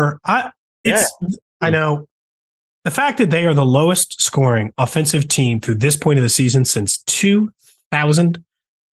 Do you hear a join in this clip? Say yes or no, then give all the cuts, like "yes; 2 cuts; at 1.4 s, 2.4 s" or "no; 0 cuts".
yes; 1 cut; at 1.6 s